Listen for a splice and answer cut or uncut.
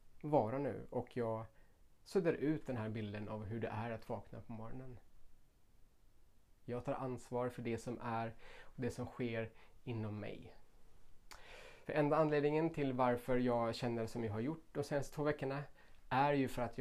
cut